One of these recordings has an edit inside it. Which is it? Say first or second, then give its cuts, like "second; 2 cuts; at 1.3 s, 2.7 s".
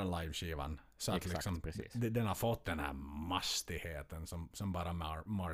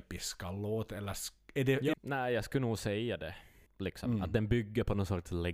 second; 2 cuts; at 1.9 s, 3.7 s